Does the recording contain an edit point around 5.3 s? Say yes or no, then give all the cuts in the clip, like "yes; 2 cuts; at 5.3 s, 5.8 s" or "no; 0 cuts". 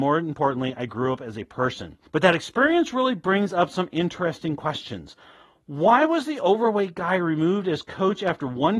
no; 1 cut; at 2.1 s